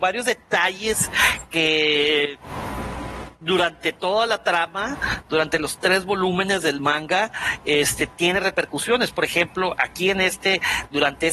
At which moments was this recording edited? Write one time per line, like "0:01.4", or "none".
none